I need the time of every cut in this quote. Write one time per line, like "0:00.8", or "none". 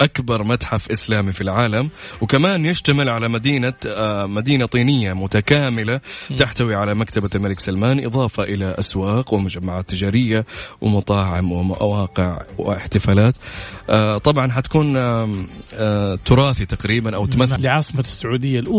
0:17.6

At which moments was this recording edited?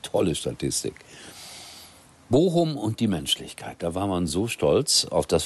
none

